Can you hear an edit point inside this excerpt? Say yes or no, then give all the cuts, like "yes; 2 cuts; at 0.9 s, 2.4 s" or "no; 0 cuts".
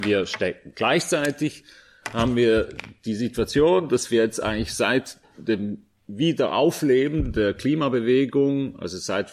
no; 0 cuts